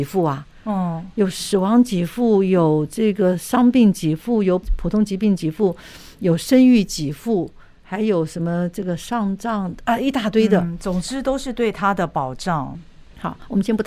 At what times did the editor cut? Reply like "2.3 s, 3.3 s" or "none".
12.7 s